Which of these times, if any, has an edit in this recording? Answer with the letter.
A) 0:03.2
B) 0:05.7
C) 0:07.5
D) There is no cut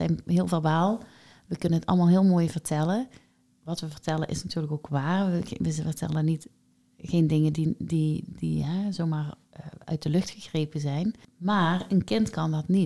D